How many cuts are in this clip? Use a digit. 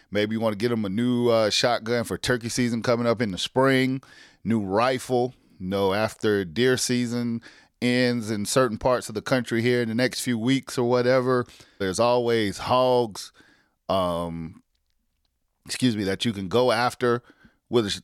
1